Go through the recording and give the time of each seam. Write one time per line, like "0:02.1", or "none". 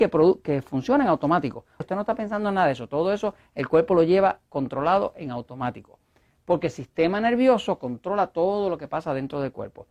0:01.8